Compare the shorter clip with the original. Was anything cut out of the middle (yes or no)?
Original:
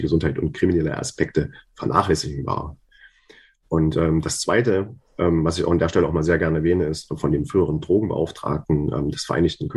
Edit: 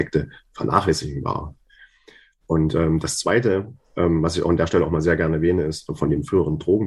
no